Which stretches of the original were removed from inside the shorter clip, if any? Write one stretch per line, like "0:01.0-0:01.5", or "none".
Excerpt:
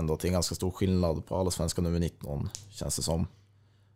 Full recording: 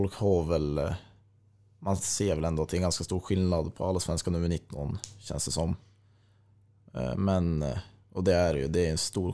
none